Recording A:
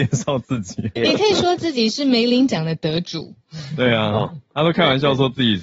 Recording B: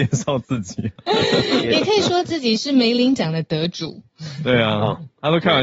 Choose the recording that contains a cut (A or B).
A